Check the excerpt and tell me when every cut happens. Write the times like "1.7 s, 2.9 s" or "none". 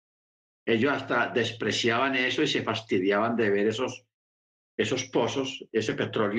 none